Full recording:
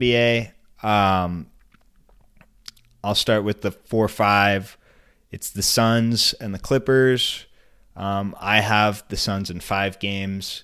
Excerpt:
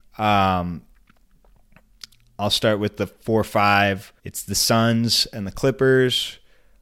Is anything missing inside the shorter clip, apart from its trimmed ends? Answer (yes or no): yes